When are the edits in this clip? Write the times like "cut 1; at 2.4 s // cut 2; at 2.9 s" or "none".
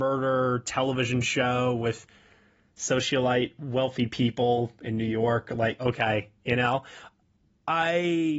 cut 1; at 5.8 s